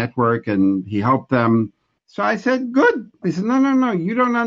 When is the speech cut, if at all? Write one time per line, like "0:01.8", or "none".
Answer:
0:02.0
0:03.2